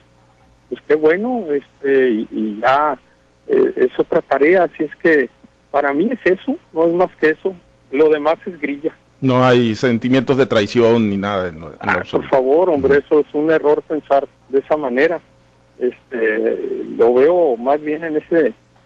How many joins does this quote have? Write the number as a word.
zero